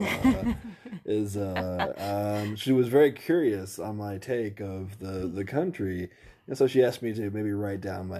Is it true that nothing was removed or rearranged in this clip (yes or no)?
no